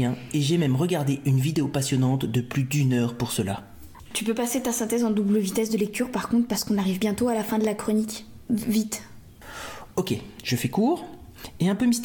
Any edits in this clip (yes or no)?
no